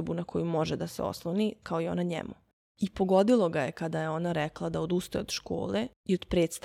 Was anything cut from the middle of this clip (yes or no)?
yes